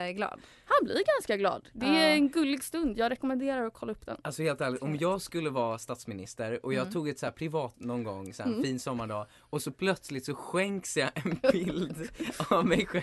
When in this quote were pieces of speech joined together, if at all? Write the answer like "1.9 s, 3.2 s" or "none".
7.7 s